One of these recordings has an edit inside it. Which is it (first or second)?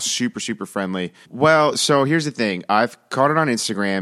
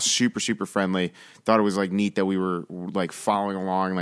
first